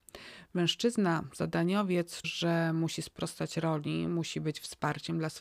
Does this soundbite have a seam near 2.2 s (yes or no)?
yes